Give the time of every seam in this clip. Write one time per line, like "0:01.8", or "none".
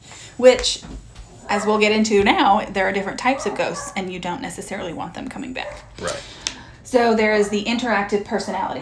none